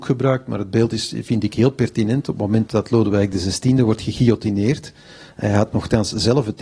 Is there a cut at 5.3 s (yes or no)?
no